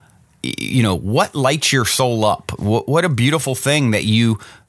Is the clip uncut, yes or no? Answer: yes